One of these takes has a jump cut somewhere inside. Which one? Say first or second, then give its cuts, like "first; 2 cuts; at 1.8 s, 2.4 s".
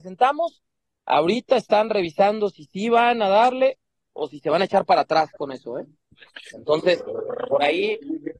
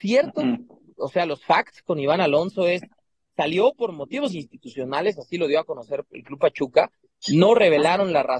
first; 1 cut; at 6.5 s